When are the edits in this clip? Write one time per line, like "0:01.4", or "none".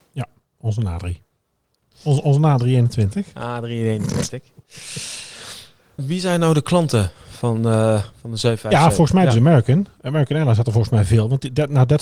0:06.0